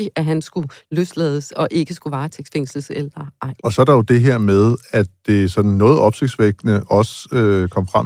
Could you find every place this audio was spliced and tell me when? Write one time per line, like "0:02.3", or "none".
0:03.6